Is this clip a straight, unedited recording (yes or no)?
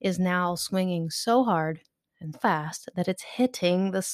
no